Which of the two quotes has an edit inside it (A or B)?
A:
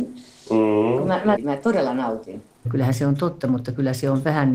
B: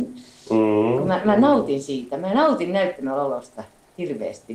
A